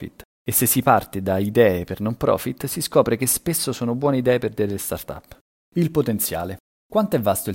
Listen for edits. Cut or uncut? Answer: uncut